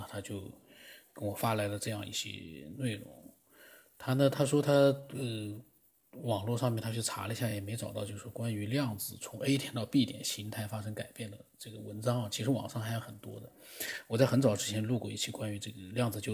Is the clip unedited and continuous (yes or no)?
yes